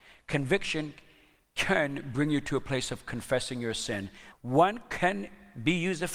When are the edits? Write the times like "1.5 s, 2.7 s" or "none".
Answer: 4.3 s